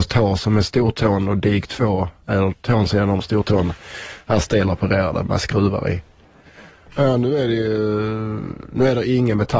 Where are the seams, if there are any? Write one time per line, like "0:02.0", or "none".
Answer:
0:06.9